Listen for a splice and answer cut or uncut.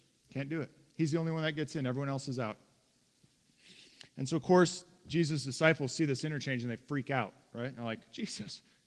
uncut